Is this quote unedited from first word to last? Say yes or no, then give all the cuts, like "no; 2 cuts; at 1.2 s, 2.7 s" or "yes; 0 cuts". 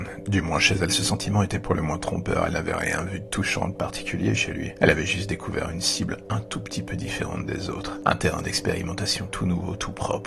yes; 0 cuts